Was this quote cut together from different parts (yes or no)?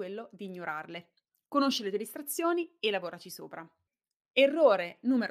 no